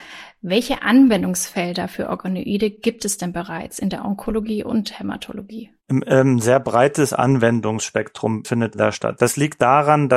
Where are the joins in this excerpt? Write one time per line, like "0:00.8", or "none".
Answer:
0:05.8
0:09.2